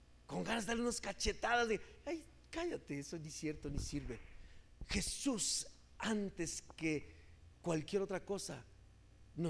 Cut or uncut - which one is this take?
uncut